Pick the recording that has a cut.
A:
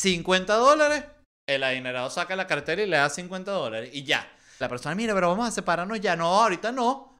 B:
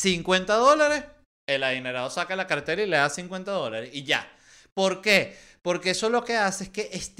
A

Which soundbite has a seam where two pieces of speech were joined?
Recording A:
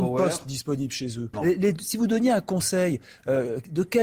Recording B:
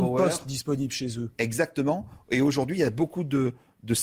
A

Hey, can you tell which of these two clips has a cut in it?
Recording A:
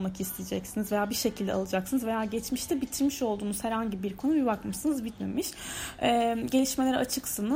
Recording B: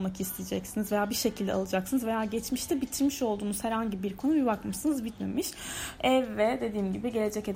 B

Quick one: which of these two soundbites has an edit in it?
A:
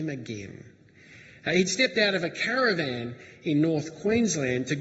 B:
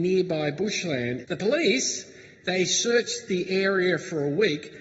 B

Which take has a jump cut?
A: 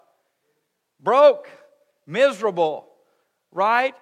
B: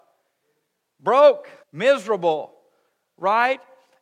B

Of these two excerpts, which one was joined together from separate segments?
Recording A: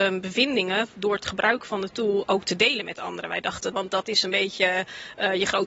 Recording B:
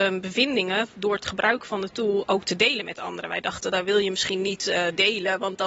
A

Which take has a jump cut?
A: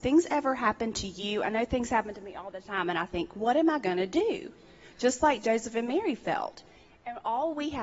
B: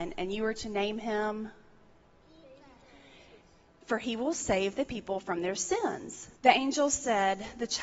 B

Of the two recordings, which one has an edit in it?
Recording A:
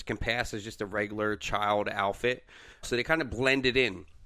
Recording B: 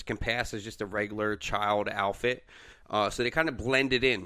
A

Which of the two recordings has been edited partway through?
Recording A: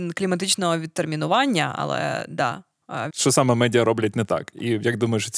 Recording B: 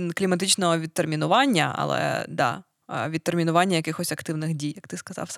A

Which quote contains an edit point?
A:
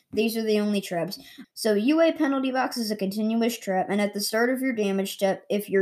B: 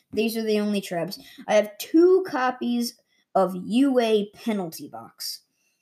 A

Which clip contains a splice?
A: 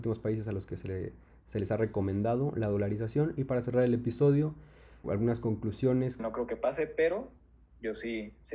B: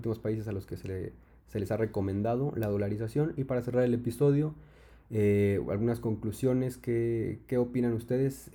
A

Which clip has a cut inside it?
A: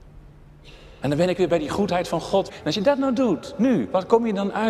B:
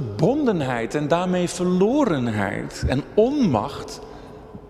A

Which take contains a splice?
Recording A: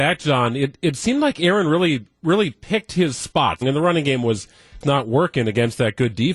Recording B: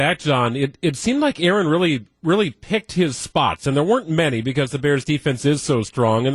A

